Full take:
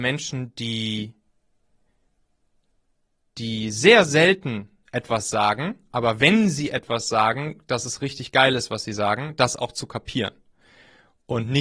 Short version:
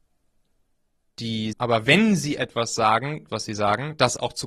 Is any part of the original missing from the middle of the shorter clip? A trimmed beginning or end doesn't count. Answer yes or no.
yes